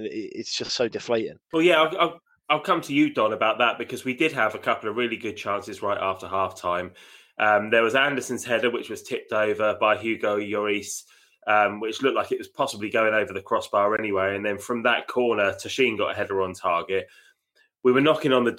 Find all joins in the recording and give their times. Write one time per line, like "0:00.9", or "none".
0:01.4